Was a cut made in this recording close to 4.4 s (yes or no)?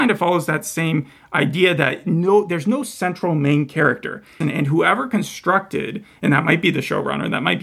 yes